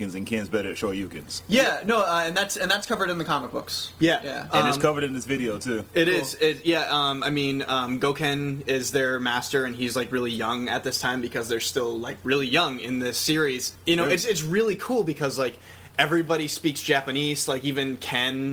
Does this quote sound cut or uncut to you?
uncut